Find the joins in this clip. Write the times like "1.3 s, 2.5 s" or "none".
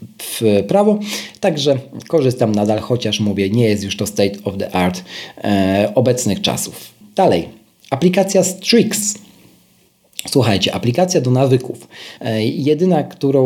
12.2 s